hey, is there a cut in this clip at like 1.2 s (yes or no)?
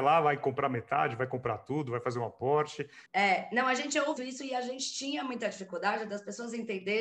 no